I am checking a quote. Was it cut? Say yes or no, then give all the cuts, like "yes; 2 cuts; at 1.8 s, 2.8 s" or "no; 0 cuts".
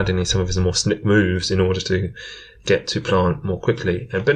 no; 0 cuts